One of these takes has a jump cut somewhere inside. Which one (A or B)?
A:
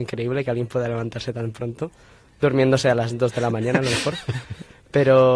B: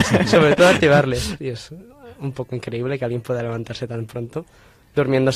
B